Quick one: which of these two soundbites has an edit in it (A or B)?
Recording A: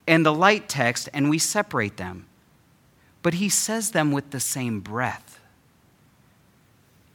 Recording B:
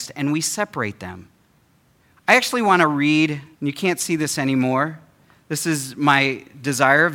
B